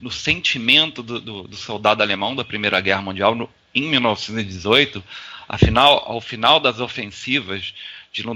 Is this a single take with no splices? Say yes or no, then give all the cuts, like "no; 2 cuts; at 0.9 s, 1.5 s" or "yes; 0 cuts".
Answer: yes; 0 cuts